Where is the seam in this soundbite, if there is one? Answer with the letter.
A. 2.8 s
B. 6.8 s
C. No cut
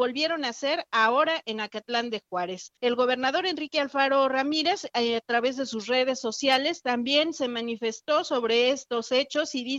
A